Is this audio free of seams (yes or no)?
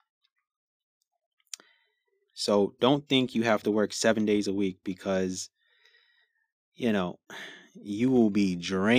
no